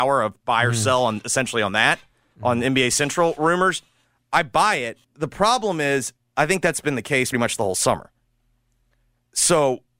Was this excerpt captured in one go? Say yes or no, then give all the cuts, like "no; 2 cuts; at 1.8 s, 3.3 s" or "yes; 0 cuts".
no; 2 cuts; at 5.0 s, 7.3 s